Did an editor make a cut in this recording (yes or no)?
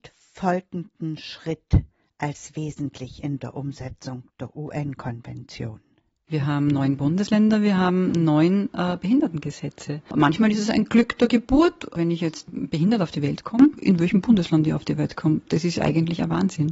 yes